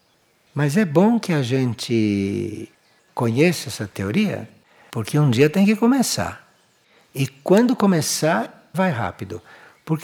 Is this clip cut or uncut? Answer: cut